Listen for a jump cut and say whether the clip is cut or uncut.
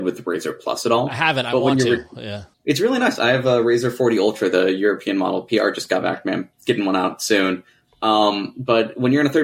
cut